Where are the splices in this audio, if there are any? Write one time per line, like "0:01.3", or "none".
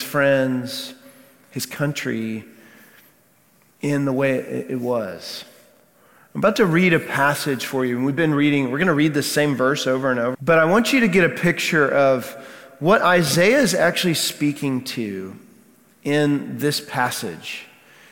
0:10.3